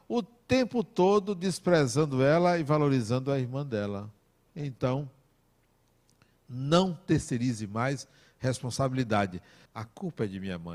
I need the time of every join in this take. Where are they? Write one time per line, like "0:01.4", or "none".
0:04.5
0:09.7